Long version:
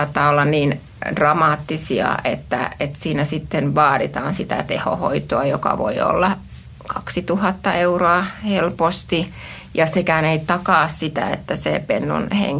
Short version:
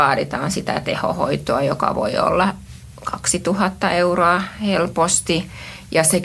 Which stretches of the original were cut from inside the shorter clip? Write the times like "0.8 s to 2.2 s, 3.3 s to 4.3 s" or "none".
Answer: none